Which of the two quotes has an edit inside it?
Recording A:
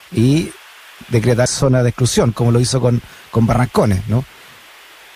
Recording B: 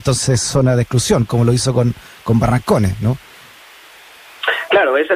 A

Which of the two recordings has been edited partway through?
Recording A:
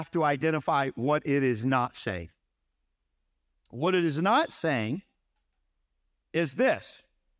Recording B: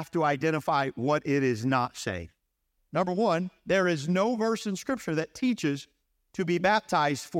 B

